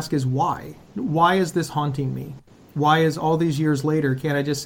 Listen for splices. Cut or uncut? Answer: uncut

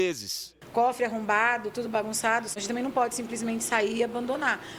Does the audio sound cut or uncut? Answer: cut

